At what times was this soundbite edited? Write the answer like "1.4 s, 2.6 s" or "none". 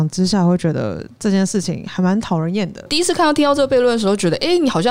2.9 s